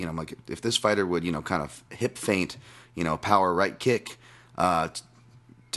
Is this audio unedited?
yes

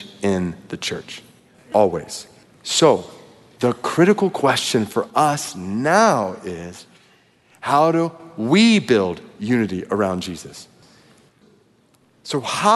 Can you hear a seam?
no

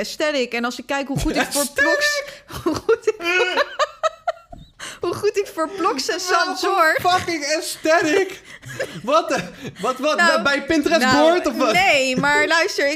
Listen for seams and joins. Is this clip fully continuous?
yes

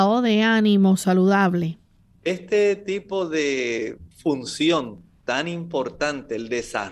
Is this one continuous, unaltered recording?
no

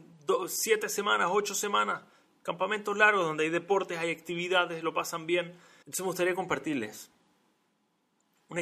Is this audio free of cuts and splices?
no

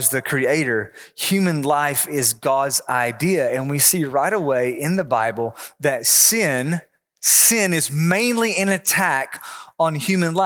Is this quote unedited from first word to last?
yes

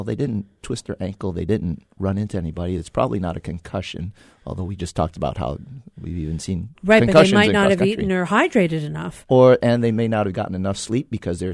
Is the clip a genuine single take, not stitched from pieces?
yes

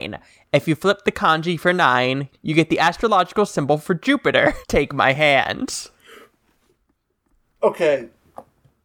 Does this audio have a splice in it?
yes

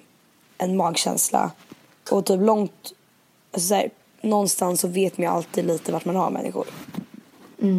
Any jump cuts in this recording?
no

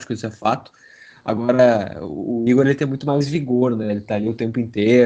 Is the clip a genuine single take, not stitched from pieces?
yes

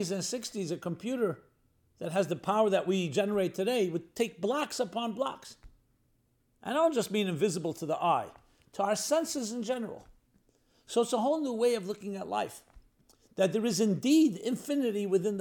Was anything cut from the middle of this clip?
yes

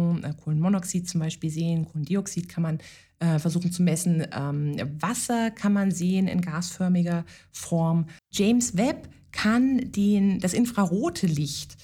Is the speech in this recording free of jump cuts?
no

